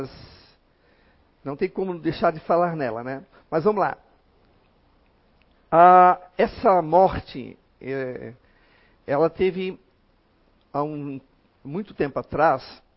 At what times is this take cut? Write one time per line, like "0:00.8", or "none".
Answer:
none